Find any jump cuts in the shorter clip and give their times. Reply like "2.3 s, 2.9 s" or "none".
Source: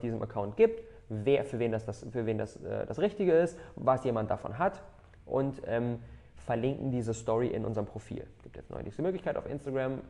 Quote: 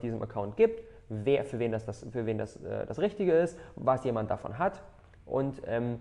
none

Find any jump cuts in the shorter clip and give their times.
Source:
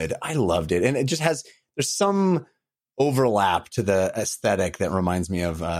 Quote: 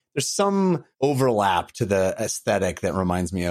0.9 s

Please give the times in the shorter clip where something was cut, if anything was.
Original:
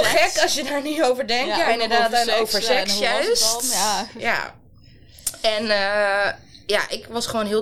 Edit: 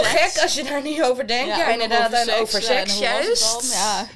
none

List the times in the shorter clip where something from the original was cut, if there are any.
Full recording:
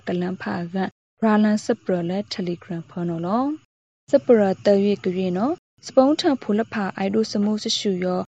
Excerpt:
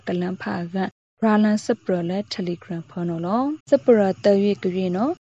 3.6 s

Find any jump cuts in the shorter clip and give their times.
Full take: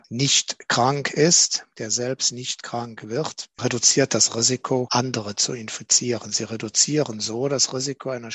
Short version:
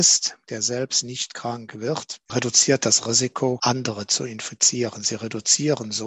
none

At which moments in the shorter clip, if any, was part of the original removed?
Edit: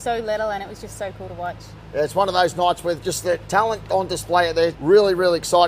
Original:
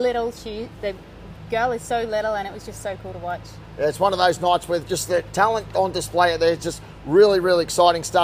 4.7 s

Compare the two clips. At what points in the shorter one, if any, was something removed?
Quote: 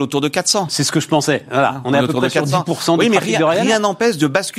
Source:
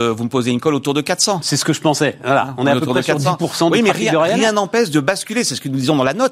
none

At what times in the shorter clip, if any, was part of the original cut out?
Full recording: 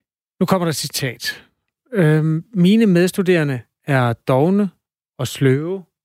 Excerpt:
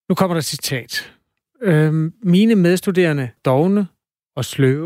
3.4 s

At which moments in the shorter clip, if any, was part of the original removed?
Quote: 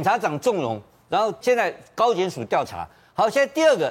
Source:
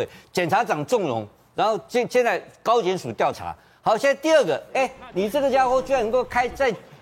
1.4 s

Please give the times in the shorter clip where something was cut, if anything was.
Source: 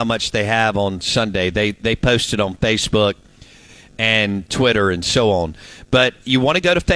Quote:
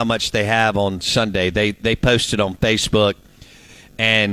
none

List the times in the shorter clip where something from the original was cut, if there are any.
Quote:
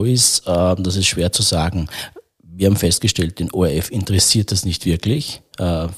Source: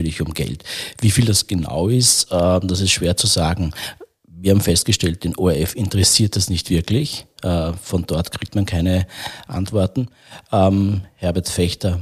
none

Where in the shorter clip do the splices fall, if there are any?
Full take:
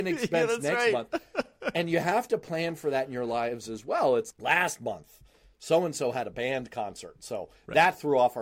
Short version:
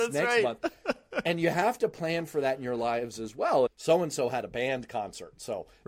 3.7 s

